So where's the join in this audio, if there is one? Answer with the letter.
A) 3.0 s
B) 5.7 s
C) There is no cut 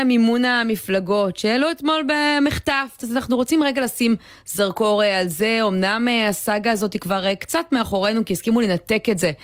A